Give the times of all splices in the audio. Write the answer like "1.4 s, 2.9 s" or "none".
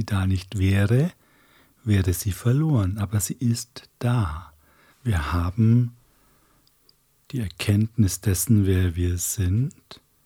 4.9 s